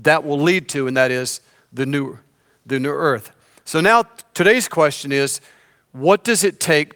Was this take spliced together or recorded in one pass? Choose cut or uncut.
uncut